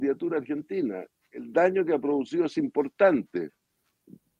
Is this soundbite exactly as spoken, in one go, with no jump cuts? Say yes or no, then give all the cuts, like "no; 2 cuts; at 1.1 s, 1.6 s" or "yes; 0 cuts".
yes; 0 cuts